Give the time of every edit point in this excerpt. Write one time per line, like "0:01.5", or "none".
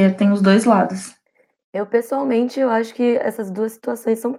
none